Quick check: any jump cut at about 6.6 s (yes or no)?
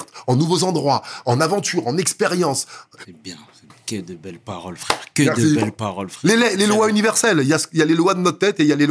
yes